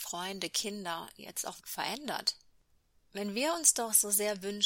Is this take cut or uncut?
cut